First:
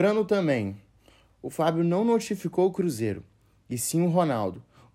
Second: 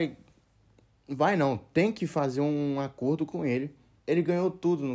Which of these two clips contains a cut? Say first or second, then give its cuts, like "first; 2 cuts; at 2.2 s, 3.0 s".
second; 1 cut; at 4.0 s